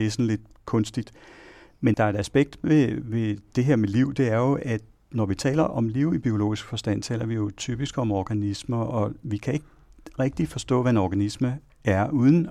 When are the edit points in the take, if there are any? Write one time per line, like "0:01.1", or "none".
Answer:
none